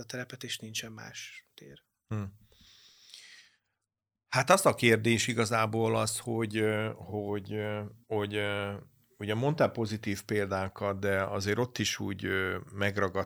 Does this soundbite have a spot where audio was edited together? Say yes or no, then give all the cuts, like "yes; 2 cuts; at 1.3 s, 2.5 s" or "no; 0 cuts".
yes; 1 cut; at 8.0 s